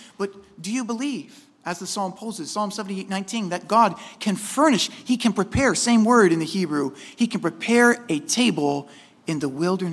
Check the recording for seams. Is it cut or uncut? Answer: uncut